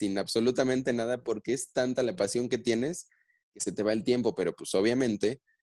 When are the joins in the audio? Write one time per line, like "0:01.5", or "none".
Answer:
none